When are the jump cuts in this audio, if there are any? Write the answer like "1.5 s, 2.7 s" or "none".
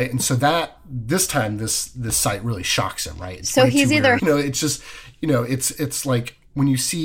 4.2 s